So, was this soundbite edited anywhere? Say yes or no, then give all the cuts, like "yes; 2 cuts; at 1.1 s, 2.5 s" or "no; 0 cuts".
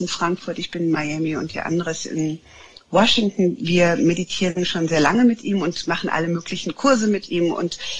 no; 0 cuts